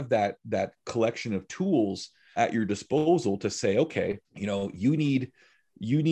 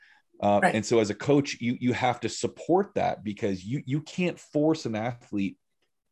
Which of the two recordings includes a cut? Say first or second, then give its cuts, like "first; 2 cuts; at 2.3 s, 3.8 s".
first; 2 cuts; at 2.4 s, 4.2 s